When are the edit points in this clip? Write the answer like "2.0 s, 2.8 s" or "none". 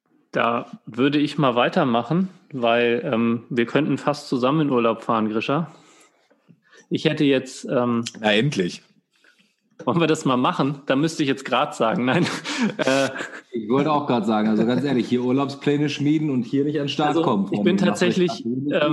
none